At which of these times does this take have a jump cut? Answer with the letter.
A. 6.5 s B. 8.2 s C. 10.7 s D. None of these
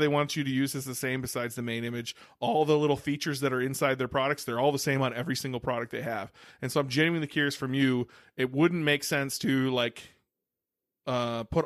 D